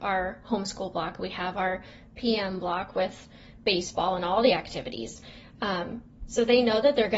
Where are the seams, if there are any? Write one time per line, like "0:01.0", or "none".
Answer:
none